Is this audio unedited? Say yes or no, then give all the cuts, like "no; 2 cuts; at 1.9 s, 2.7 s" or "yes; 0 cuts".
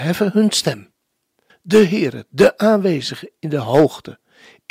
no; 1 cut; at 1.5 s